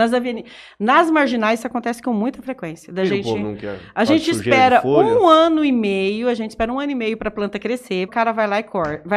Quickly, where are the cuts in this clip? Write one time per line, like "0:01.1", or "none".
0:08.1